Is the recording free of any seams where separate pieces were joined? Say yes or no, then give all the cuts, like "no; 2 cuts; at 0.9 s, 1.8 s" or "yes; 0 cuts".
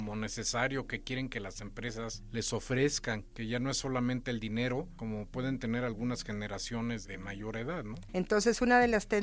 no; 1 cut; at 8.1 s